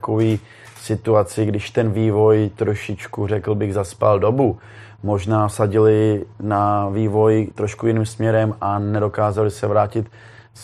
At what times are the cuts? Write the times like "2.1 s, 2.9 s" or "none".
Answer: none